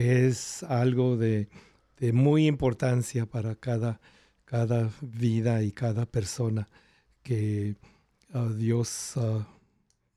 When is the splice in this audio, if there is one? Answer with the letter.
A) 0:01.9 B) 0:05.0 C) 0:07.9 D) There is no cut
D